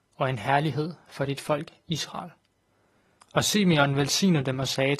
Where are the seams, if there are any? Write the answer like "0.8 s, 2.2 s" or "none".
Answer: 3.2 s